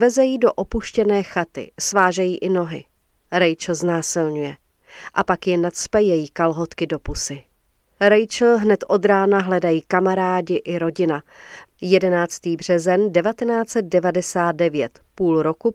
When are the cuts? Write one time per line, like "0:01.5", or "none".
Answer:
0:08.0
0:11.7